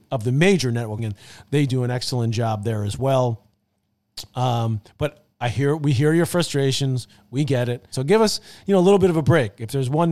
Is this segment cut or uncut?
cut